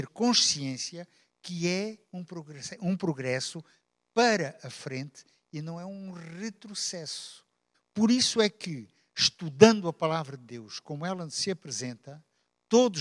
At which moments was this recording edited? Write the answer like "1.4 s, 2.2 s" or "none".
7.7 s